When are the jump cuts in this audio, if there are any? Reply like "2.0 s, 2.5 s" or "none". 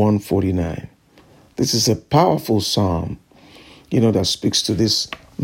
none